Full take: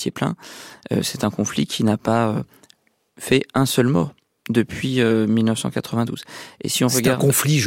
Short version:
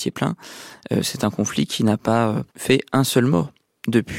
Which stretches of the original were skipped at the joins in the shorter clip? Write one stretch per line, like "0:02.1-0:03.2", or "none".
0:02.5-0:03.1